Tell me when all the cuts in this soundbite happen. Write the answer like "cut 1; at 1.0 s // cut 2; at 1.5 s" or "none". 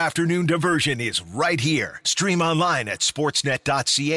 none